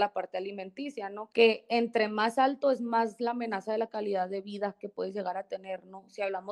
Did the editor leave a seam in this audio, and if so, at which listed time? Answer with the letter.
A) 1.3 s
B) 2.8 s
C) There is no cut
A